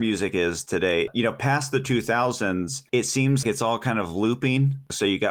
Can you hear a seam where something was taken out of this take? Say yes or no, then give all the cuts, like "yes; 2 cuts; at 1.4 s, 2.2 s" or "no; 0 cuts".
yes; 1 cut; at 3.4 s